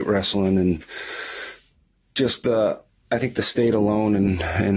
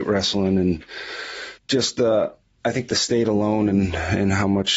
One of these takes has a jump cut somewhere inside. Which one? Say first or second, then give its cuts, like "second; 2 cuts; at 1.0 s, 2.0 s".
second; 1 cut; at 1.6 s